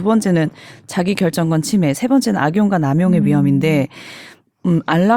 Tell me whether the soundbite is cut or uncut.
uncut